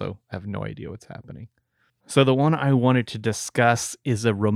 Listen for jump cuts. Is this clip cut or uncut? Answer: cut